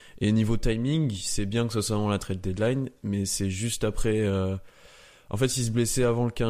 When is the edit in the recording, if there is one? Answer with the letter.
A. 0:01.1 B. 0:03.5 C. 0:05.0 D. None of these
D